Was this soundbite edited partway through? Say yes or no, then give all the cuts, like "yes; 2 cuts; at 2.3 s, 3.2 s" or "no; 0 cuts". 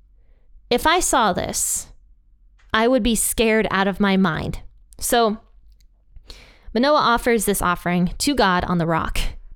yes; 1 cut; at 4.8 s